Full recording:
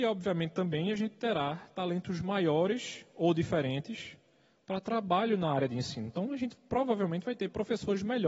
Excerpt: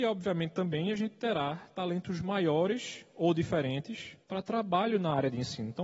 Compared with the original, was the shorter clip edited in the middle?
yes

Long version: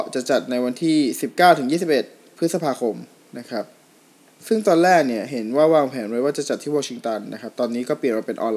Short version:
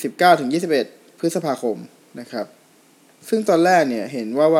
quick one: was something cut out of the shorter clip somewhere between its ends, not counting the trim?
no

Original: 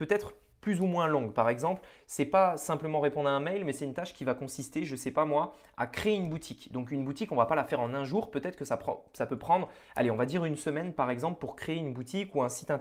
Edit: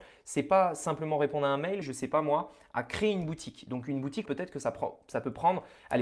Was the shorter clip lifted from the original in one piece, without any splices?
no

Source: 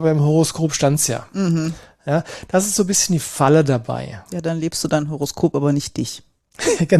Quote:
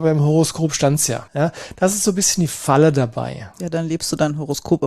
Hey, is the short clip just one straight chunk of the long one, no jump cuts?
no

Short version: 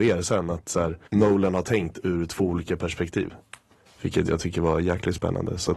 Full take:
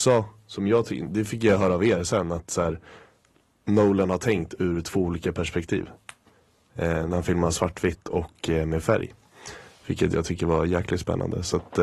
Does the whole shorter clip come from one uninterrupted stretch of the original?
no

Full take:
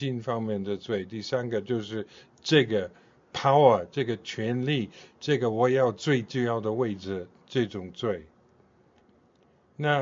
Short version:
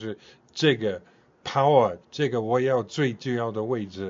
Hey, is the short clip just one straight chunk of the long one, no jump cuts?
no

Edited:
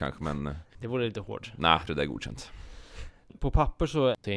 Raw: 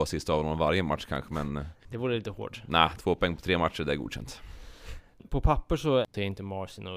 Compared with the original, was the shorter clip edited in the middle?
yes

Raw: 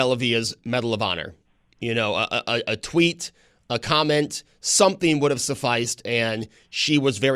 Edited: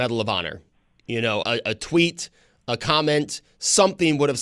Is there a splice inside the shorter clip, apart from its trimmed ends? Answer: yes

